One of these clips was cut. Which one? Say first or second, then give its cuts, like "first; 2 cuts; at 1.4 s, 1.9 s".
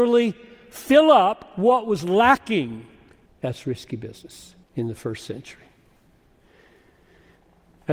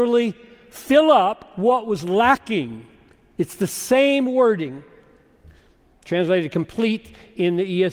first; 2 cuts; at 3.3 s, 4.6 s